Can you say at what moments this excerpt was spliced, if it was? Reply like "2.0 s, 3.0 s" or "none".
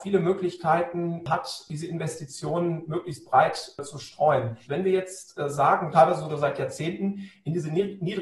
4.6 s, 5.9 s